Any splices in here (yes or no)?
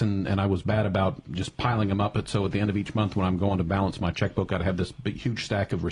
yes